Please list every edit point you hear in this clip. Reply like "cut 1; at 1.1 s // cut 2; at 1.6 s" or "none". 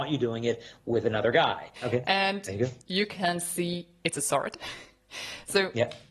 cut 1; at 1.8 s